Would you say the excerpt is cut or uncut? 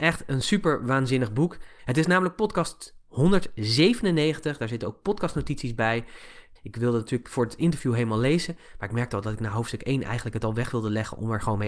cut